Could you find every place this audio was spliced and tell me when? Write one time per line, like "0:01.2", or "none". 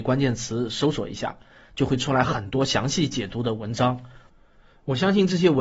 none